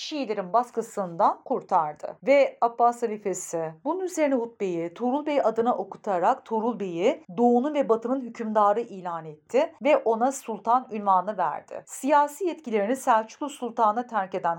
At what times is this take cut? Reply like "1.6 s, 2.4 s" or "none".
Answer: none

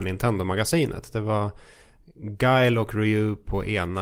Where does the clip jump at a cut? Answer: none

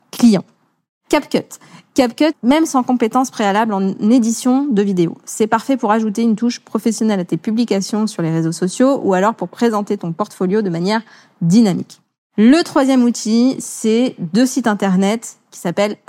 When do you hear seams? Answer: 2.3 s

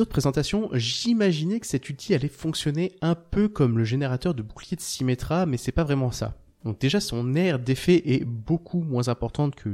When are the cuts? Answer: none

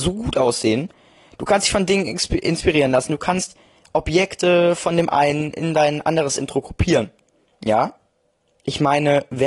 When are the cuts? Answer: none

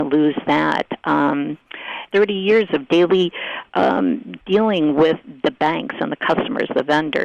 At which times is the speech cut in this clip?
2.1 s

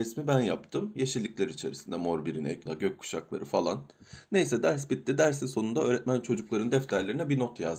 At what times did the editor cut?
2.7 s

